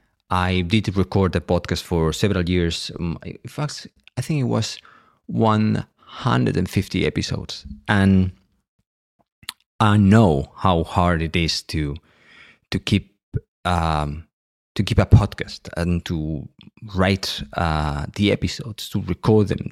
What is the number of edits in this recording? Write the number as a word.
one